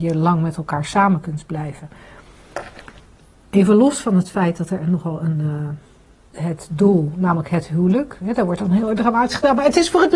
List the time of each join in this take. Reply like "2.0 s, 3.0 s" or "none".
6.3 s